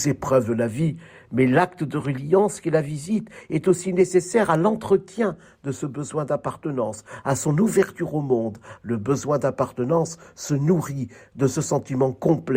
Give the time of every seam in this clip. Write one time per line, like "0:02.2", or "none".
0:07.2
0:08.8